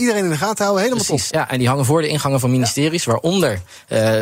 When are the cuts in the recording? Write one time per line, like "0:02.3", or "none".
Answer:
0:01.3